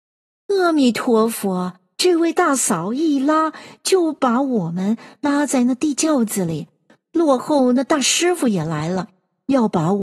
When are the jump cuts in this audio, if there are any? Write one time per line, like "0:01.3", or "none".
0:01.9